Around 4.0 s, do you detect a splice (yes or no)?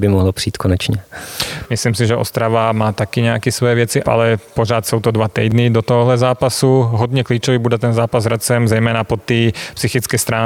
yes